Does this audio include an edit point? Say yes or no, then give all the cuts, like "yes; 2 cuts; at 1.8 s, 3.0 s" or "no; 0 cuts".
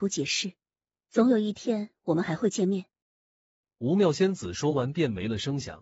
yes; 1 cut; at 1.0 s